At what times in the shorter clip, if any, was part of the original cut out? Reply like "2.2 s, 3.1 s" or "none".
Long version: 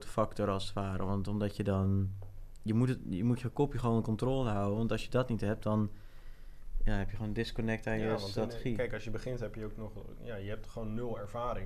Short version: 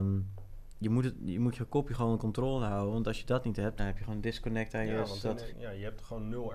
3.8 s, 5.5 s